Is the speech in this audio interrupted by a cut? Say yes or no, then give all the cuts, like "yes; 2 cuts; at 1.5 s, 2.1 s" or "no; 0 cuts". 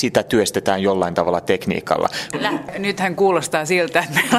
yes; 1 cut; at 2.3 s